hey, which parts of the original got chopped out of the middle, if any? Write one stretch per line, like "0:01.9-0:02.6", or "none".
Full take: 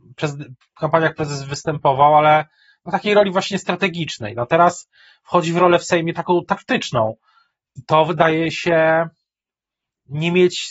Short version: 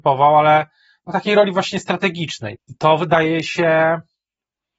0:04.3-0:07.6

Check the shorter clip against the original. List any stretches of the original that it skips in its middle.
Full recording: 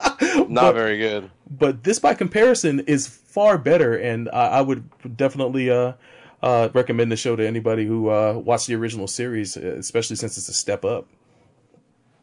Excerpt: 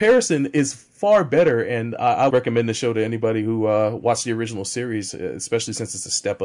0:04.6-0:06.7

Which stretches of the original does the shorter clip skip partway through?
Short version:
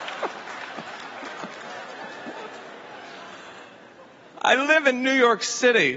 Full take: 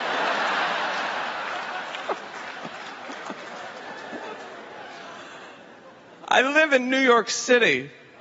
none

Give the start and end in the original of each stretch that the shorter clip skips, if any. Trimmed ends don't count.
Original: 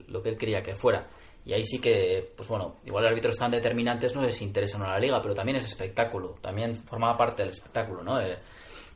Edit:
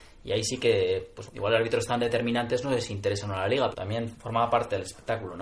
0:02.5-0:02.8
0:05.2-0:06.4

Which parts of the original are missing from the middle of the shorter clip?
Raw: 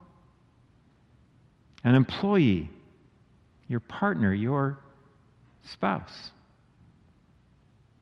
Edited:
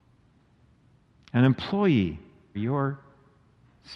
0:03.1-0:04.3

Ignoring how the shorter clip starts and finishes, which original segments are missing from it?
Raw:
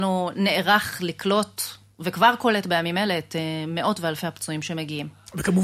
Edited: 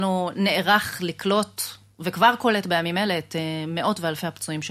none

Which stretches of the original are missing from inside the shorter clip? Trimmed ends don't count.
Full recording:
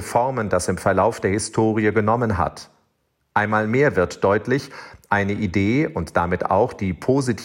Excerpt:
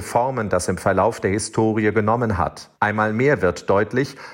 0:02.7-0:03.3

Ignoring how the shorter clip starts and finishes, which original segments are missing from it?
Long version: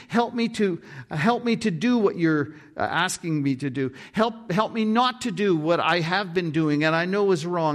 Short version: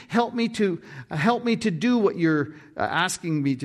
none

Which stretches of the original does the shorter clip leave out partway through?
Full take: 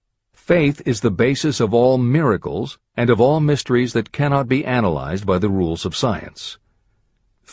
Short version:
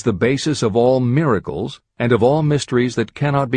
none

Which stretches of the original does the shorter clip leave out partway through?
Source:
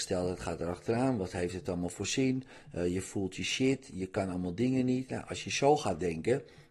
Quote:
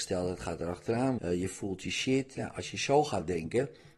0:01.2-0:02.7
0:03.9-0:05.1

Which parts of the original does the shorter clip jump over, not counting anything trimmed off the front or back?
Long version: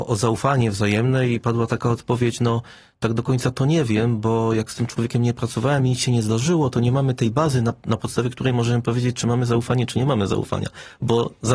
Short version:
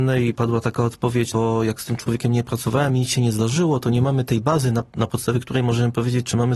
0:02.4-0:04.2

